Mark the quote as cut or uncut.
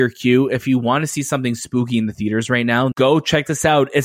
cut